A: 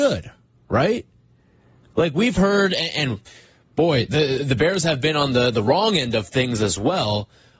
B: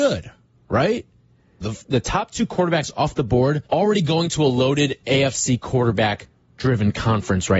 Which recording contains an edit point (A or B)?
B